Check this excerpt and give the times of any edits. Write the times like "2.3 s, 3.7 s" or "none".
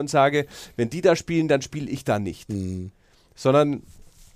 none